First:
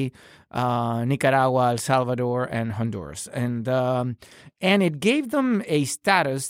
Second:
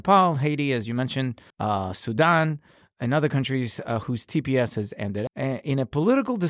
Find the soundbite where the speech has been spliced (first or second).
second